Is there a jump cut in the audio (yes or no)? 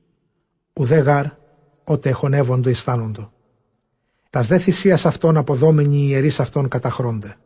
yes